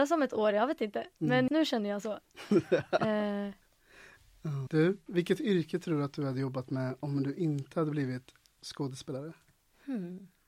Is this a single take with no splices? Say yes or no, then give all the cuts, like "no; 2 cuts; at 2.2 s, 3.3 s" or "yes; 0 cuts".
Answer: no; 2 cuts; at 1.5 s, 4.7 s